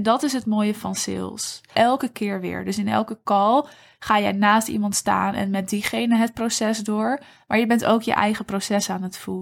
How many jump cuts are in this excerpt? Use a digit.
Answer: 1